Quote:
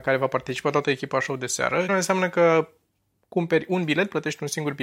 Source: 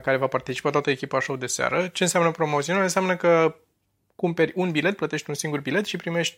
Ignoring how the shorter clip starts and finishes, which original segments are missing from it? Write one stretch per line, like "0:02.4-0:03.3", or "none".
0:01.9-0:02.8